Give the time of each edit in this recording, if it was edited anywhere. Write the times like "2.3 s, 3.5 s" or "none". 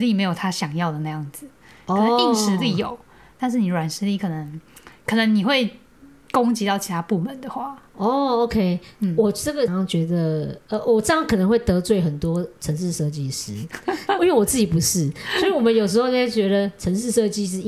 9.7 s, 14.2 s